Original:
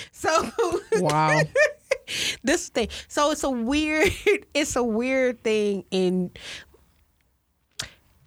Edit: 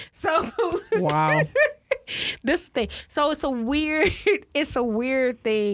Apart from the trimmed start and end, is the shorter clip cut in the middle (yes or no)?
no